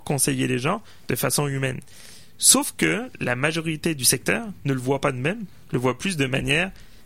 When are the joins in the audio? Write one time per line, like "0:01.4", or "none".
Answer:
none